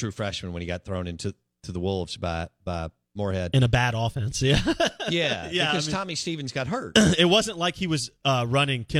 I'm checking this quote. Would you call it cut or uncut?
uncut